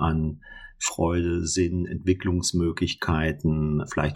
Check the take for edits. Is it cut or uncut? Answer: uncut